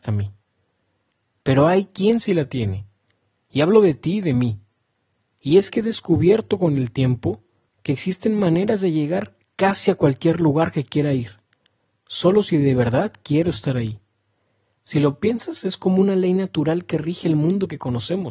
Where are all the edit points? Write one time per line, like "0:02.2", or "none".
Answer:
0:14.7